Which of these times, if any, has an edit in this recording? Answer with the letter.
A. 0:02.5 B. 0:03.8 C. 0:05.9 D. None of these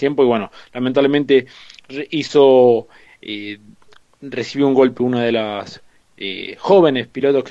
D